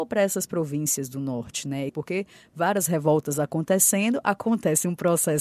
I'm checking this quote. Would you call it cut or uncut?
cut